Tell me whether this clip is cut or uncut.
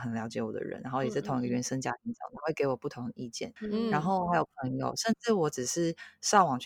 cut